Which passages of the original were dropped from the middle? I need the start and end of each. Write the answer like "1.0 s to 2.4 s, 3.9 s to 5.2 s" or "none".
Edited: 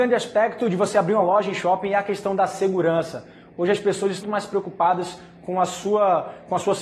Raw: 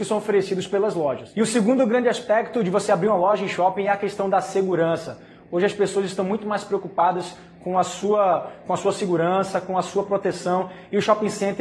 6.2 s to 6.4 s